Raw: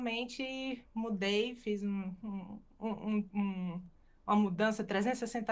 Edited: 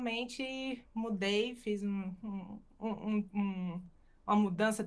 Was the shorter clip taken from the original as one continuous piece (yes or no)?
yes